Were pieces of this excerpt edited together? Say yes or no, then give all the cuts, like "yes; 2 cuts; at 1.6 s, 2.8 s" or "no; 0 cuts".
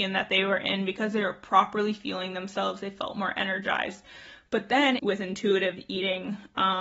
yes; 1 cut; at 5.0 s